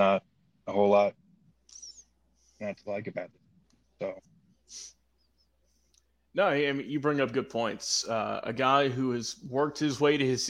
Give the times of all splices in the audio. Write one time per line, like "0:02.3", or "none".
none

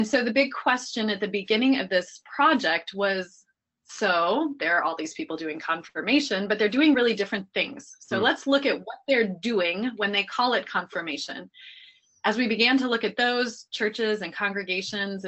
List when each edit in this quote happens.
none

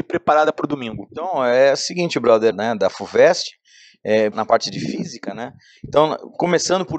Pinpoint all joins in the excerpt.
0:02.5
0:04.3

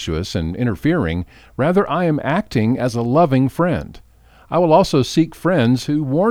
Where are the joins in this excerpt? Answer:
none

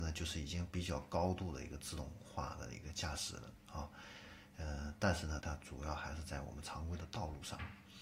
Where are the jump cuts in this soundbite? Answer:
0:05.4

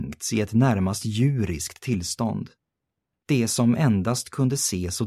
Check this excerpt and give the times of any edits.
0:03.2

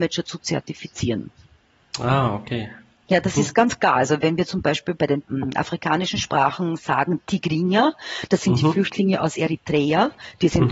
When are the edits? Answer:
none

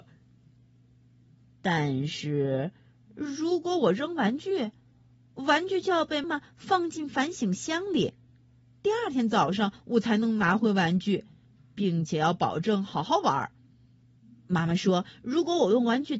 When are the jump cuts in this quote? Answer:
0:06.2

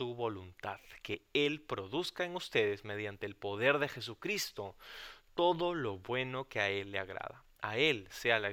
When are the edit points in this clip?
none

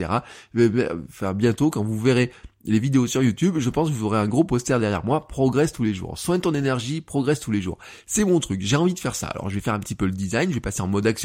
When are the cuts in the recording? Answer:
none

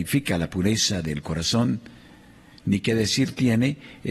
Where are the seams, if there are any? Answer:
none

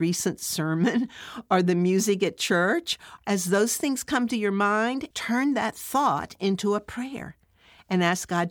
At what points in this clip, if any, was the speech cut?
0:03.2
0:05.1

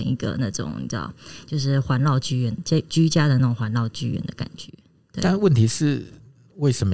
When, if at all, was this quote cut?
none

